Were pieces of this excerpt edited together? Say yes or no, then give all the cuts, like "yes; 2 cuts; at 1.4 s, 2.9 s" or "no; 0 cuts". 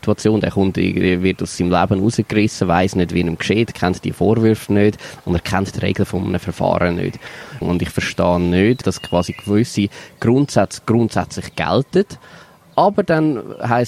yes; 2 cuts; at 7.6 s, 8.8 s